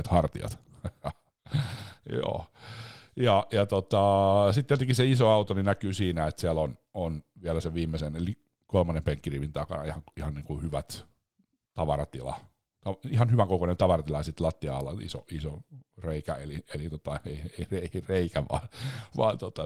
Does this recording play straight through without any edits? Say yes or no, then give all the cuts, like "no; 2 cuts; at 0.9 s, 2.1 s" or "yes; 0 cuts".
yes; 0 cuts